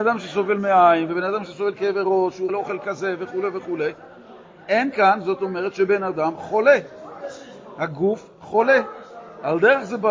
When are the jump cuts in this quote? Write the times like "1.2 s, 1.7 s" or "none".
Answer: 2.5 s